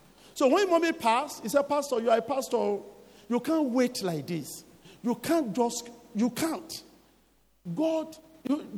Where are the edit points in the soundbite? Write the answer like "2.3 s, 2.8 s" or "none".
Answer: none